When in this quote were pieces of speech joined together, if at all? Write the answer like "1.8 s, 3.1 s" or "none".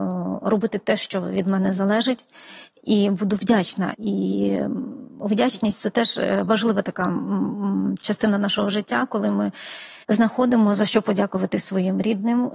3.9 s, 10.0 s